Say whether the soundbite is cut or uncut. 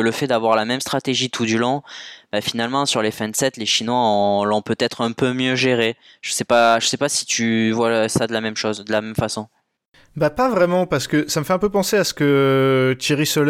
uncut